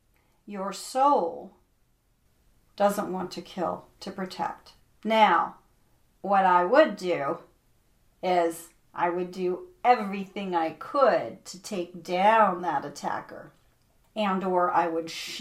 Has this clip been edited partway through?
yes; 1 cut; at 4.0 s

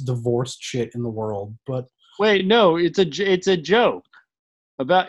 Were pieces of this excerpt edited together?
no; 0 cuts

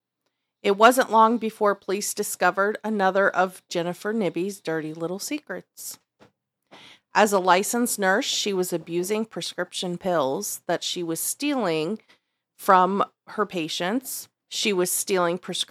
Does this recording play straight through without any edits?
no; 1 cut; at 14.4 s

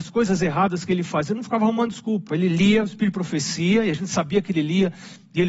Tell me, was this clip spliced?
no; 0 cuts

